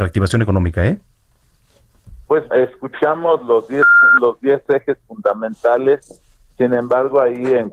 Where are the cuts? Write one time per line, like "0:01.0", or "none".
0:02.5